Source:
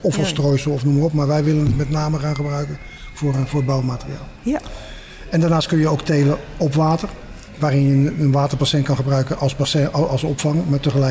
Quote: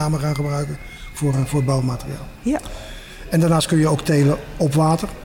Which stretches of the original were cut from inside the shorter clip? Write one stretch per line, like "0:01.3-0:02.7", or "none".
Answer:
none